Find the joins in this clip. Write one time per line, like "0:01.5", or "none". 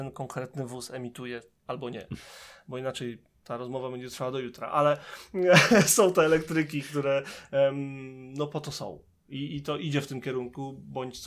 none